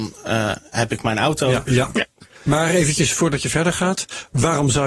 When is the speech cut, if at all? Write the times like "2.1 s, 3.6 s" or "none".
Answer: 1.7 s

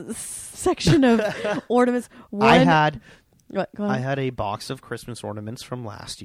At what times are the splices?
none

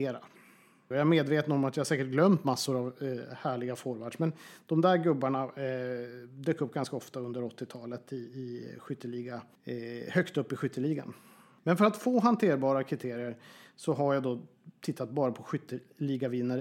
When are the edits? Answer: 0.9 s

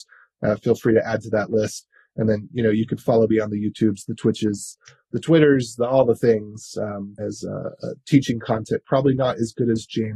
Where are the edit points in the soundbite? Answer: 7.2 s

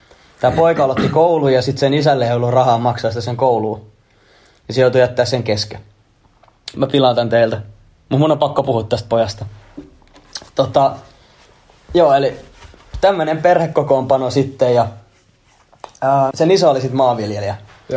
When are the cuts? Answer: 6.7 s, 16.3 s

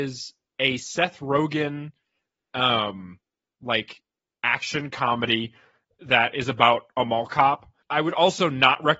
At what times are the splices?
7.8 s

